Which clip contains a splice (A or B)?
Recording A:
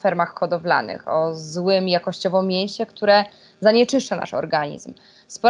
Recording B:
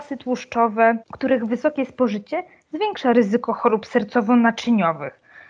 B